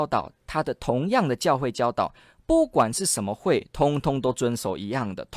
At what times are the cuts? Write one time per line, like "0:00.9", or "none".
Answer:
none